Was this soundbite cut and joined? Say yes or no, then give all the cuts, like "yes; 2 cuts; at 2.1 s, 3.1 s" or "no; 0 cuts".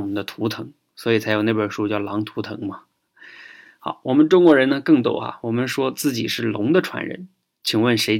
no; 0 cuts